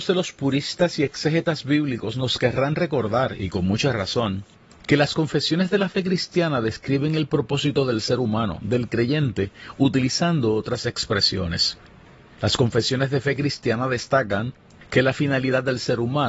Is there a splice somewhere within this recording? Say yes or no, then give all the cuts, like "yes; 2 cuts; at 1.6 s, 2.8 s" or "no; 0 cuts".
no; 0 cuts